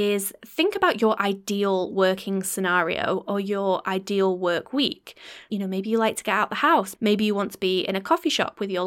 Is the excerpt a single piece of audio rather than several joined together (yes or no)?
no